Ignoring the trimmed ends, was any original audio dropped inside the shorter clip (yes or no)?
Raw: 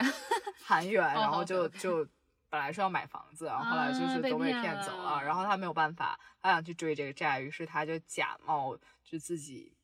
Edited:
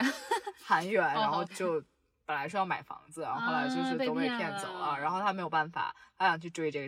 yes